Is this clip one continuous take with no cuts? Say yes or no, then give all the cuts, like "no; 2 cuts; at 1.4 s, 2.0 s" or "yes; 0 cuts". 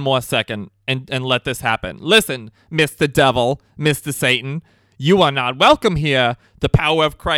yes; 0 cuts